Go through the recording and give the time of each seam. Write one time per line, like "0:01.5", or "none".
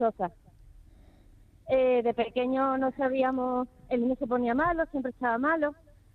none